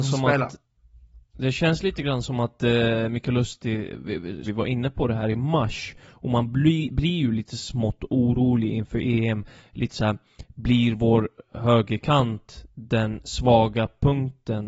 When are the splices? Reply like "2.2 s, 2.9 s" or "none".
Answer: 4.4 s